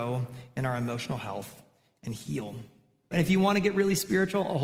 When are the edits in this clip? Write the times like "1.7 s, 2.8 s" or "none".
3.1 s